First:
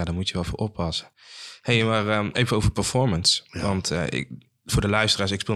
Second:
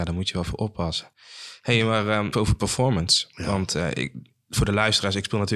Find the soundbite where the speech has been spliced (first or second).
second